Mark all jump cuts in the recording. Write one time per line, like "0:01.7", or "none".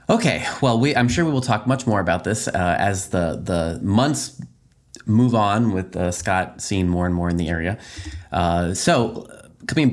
none